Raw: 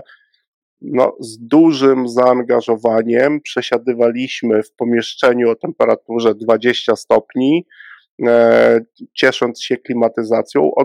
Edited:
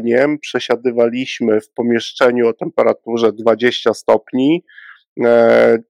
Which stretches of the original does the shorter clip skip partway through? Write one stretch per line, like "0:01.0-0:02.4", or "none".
none